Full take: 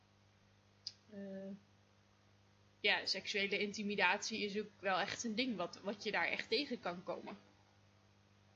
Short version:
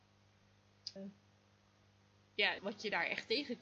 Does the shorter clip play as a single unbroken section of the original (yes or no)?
no